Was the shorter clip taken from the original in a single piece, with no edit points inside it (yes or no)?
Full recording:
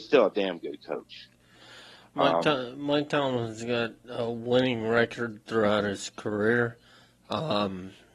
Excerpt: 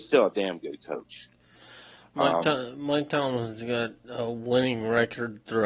yes